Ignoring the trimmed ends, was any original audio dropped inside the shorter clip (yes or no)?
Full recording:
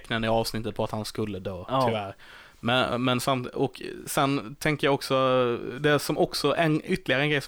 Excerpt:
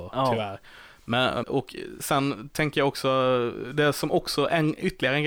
yes